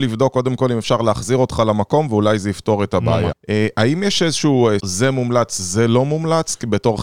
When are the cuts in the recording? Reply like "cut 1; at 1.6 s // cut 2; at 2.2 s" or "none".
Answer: cut 1; at 3.3 s // cut 2; at 4.8 s